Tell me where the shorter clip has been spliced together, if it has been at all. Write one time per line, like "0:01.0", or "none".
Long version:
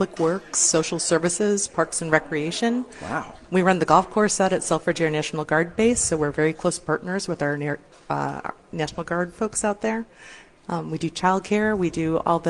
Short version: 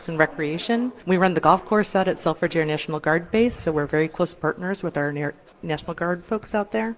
0:01.0
0:05.5